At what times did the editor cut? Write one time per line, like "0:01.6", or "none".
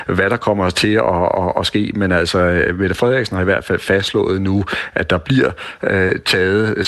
none